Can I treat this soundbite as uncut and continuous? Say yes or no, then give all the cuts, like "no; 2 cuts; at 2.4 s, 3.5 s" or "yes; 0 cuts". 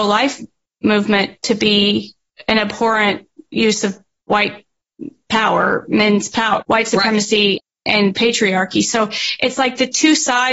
no; 1 cut; at 6.6 s